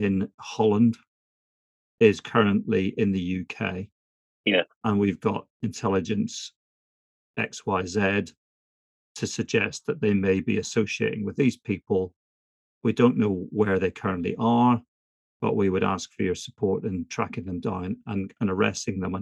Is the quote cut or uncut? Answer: uncut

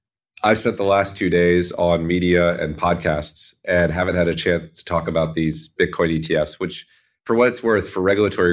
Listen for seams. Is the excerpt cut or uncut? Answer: uncut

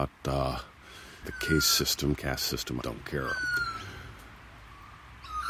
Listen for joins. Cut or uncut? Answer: cut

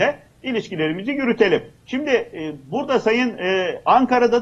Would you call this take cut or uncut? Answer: uncut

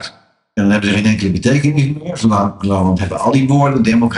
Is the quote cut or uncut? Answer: uncut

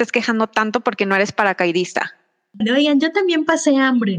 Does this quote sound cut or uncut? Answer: cut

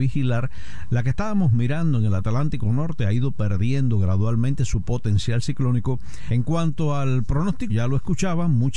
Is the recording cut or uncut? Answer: cut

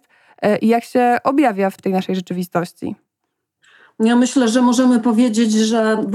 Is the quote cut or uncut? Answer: cut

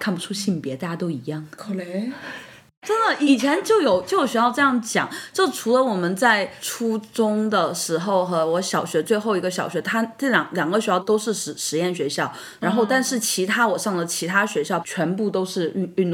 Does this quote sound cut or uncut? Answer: cut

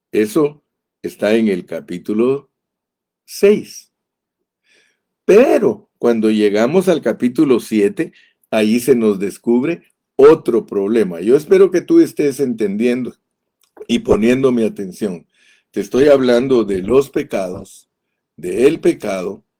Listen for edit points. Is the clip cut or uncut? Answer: uncut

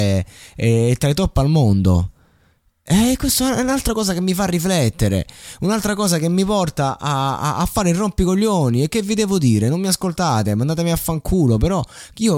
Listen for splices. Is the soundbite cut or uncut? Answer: uncut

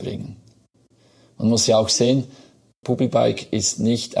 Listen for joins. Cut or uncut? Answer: cut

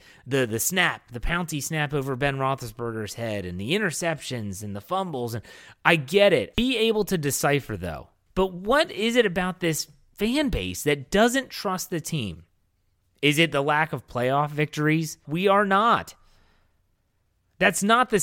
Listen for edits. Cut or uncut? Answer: cut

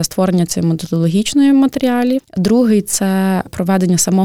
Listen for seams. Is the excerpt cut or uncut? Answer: uncut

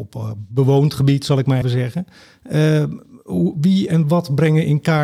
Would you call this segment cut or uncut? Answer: cut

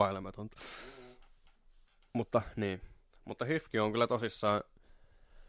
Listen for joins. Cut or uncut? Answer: uncut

